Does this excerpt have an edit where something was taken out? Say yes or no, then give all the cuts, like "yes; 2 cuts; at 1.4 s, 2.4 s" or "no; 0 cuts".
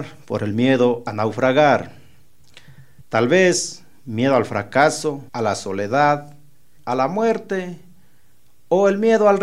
yes; 3 cuts; at 3.0 s, 5.3 s, 6.8 s